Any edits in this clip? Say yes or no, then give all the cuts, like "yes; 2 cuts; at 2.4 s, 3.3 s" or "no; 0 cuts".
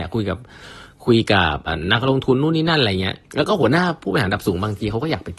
yes; 2 cuts; at 1.7 s, 3.2 s